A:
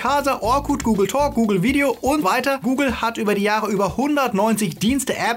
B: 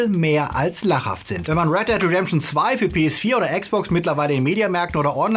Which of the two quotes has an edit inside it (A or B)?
A